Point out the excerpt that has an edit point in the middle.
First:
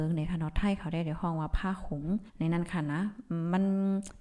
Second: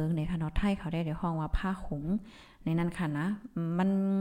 first; 1 cut; at 2.3 s

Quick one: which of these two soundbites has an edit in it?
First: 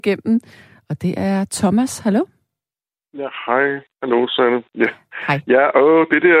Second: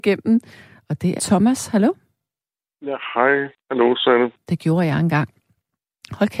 second; 2 cuts; at 1.2 s, 4.3 s

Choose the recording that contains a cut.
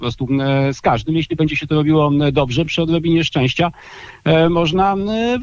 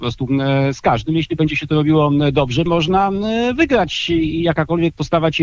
second; 1 cut; at 2.7 s

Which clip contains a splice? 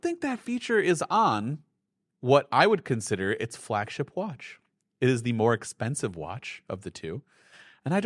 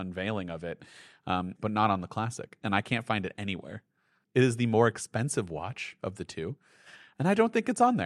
second; 2 cuts; at 1.6 s, 4.2 s

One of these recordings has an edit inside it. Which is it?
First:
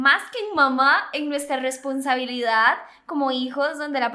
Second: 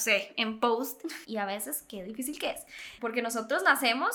second; 2 cuts; at 1.2 s, 3.0 s

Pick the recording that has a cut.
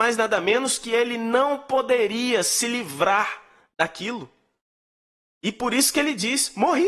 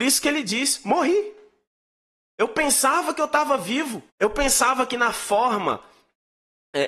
second; 1 cut; at 4.1 s

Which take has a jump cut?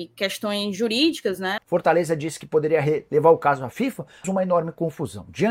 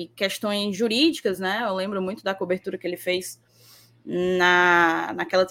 first; 2 cuts; at 1.6 s, 4.2 s

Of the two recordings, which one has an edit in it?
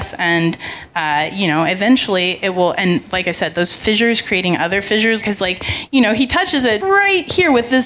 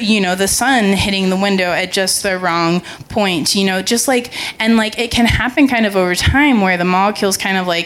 first; 2 cuts; at 5.2 s, 6.8 s

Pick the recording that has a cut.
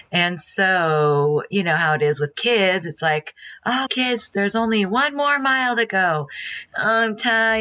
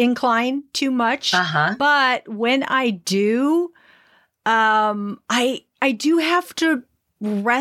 first; 2 cuts; at 3.9 s, 6.7 s

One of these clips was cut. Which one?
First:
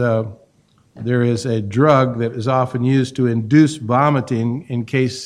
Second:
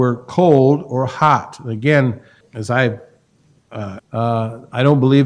second; 2 cuts; at 2.4 s, 4.0 s

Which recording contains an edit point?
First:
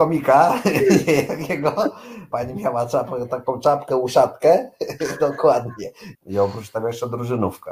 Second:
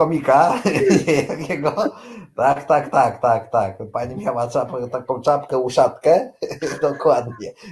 first; 2 cuts; at 2.3 s, 6.1 s

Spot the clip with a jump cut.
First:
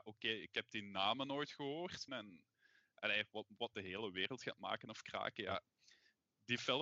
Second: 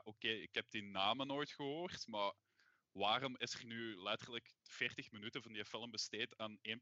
first; 2 cuts; at 2.1 s, 3.7 s

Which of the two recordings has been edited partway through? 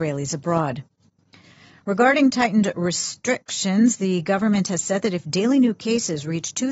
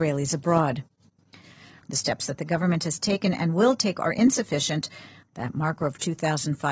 second; 2 cuts; at 1.8 s, 5.3 s

